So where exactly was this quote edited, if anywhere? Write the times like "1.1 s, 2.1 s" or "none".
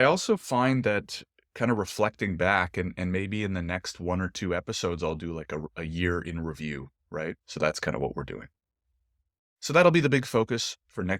7.4 s